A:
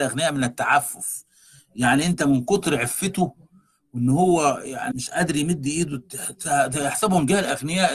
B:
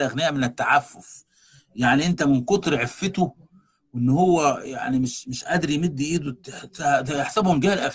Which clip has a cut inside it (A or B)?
A